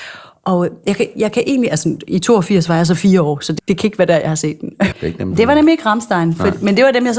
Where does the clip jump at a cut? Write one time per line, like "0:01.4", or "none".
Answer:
0:03.6
0:04.9

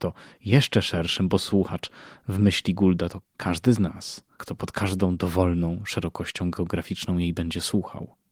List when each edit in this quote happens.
0:03.2
0:04.4

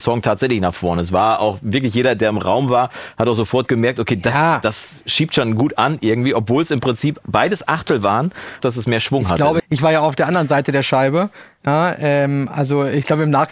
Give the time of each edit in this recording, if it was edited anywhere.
0:08.6
0:09.6

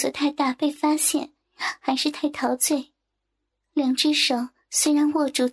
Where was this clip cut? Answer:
none

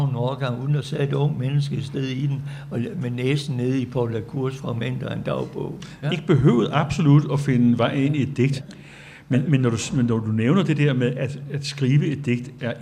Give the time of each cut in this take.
0:06.0
0:08.6

